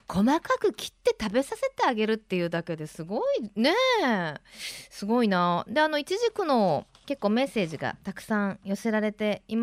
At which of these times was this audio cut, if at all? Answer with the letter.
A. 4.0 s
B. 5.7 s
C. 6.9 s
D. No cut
C